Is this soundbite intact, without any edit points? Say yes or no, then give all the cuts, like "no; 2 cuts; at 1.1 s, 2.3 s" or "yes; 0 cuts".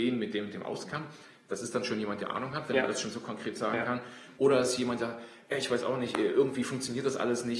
yes; 0 cuts